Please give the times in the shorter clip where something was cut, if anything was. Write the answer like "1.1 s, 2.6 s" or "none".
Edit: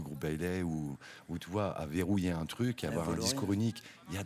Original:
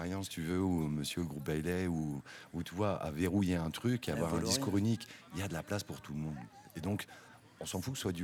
none